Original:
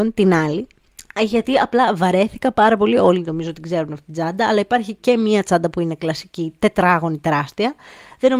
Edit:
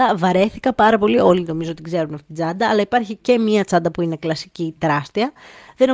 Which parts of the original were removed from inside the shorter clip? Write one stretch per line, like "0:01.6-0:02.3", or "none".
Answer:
0:06.6-0:07.2